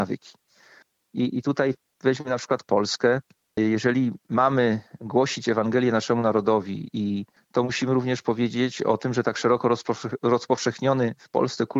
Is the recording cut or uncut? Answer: cut